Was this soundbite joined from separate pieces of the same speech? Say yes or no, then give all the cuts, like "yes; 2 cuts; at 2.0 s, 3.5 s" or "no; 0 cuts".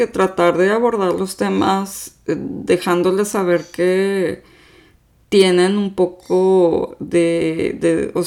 no; 0 cuts